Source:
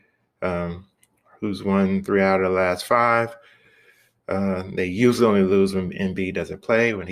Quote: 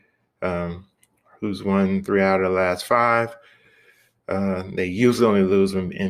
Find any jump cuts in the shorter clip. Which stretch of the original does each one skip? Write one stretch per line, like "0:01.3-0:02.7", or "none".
none